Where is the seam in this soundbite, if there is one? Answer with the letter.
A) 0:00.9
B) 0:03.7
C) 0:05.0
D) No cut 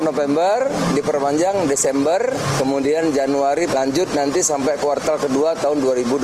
B